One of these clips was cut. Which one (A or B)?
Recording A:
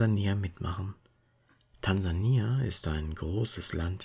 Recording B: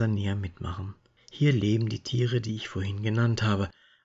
B